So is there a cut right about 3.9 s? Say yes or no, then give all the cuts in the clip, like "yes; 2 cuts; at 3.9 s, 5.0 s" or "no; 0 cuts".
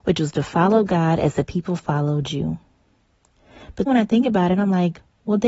yes; 1 cut; at 3.9 s